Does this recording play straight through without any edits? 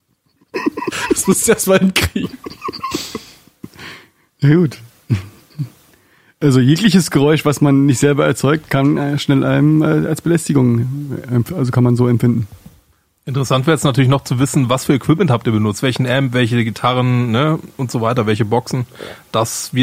yes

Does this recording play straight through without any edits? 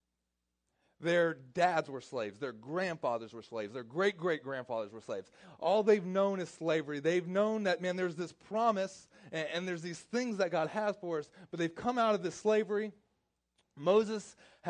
yes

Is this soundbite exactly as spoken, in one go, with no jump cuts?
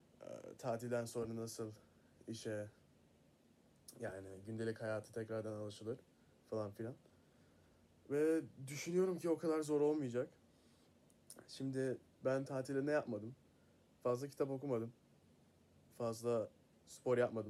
yes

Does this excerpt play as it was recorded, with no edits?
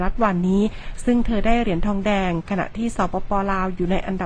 yes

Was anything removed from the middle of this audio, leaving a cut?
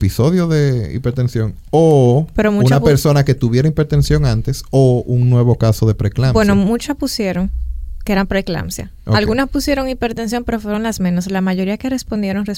no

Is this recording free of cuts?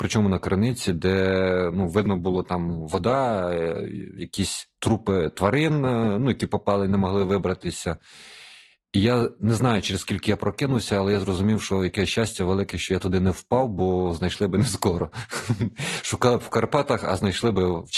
yes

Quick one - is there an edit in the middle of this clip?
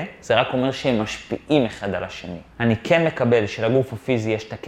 yes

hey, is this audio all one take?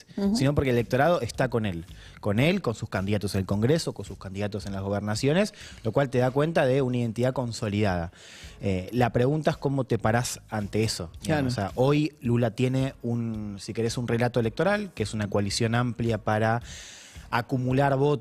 yes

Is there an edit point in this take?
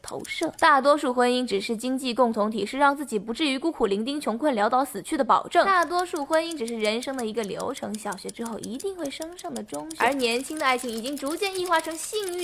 no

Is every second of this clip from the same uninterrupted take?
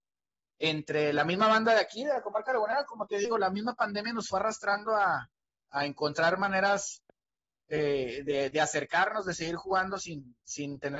yes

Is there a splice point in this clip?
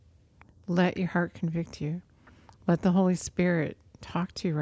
no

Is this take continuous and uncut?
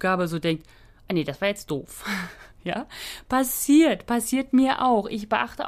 yes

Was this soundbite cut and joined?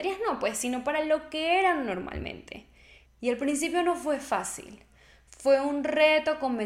yes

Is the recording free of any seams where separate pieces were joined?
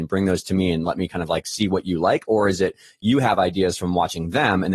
yes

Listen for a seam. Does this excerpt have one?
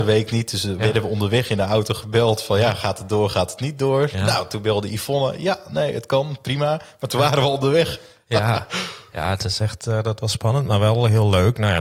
no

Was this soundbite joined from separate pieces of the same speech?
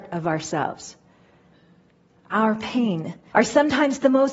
yes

